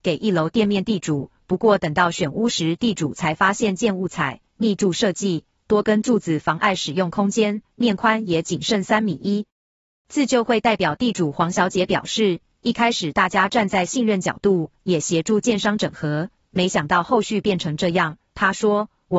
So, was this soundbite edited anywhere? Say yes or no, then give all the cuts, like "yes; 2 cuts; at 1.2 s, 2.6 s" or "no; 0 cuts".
no; 0 cuts